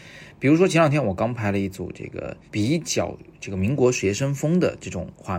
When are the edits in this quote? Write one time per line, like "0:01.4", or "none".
0:02.5